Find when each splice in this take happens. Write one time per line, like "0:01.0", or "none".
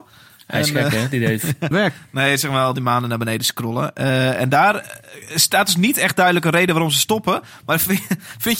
0:01.7